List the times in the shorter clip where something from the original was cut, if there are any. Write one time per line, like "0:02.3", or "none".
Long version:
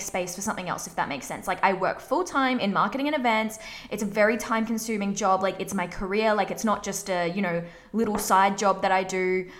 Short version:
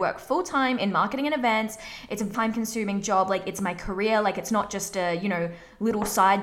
0:02.3

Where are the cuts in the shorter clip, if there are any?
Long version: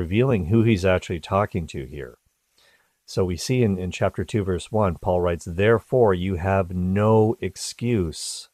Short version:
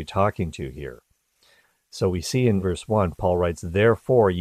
0:02.6

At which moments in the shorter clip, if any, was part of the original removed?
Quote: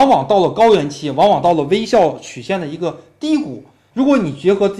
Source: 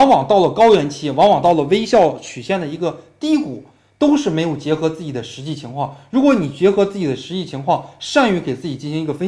0:03.9

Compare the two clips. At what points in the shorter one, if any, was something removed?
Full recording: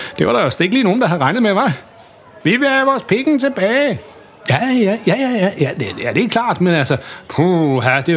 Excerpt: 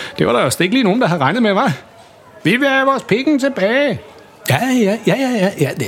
none

